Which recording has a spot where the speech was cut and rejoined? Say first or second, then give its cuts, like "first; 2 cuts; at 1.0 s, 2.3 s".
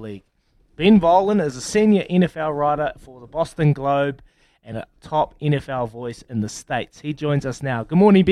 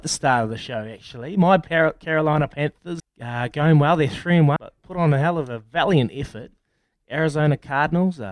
second; 2 cuts; at 3.0 s, 4.6 s